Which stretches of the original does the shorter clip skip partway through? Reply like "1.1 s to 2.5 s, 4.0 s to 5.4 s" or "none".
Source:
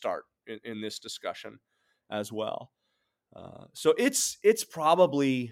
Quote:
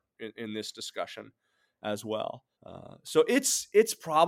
2.8 s to 3.2 s